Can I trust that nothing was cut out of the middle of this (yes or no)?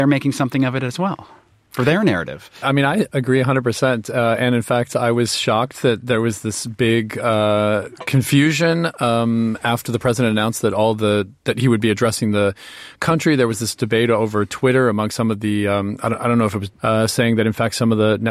no